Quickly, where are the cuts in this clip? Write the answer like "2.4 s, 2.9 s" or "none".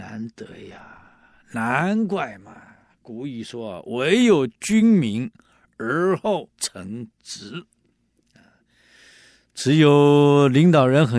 6.5 s